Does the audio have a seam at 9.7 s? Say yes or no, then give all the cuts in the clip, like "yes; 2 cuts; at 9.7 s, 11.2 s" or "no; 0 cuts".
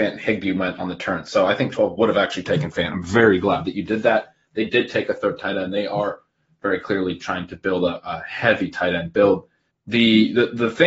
yes; 1 cut; at 9.7 s